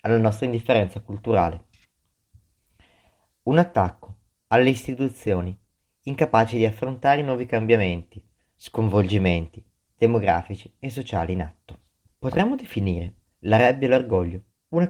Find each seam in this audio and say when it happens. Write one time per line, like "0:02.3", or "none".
0:12.1